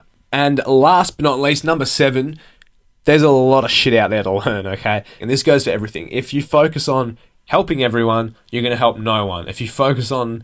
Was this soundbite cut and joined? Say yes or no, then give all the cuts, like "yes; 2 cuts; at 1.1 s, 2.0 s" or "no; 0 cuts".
yes; 1 cut; at 5.2 s